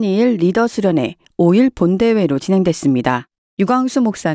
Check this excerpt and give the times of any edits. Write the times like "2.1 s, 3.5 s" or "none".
none